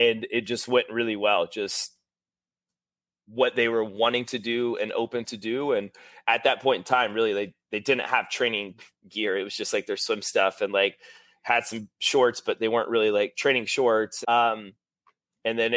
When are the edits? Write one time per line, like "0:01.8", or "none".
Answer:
0:14.2

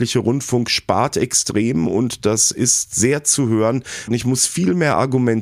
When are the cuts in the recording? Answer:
0:04.1

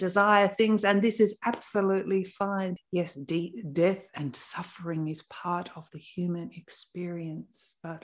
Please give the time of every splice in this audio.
0:02.8

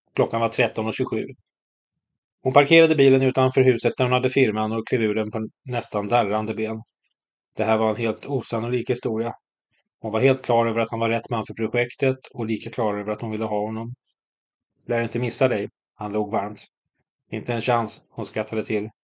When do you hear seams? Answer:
0:14.7

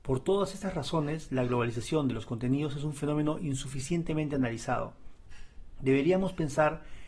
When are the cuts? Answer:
none

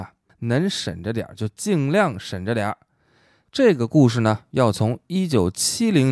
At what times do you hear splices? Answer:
0:03.5

